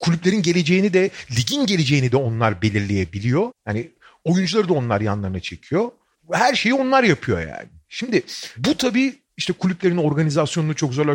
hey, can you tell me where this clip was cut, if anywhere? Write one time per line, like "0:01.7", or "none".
0:03.5